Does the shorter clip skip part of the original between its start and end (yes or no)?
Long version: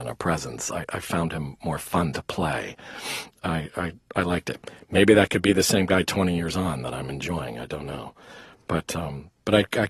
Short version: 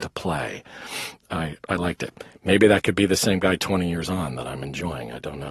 yes